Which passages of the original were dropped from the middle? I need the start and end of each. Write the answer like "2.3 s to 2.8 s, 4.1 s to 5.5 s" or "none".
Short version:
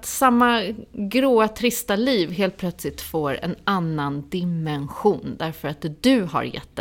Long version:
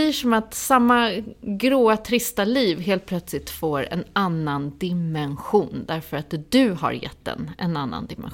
none